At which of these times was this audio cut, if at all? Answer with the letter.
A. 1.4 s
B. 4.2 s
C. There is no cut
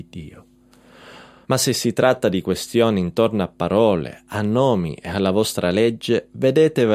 A